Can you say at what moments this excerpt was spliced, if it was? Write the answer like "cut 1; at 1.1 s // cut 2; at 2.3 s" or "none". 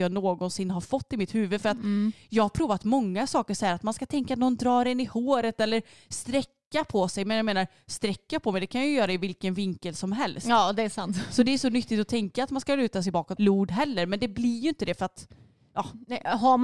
cut 1; at 13.4 s